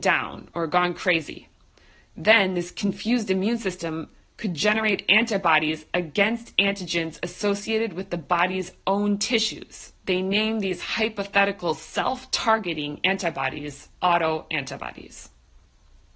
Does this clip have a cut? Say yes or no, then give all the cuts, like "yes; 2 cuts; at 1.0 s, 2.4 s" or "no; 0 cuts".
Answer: yes; 2 cuts; at 10.0 s, 13.9 s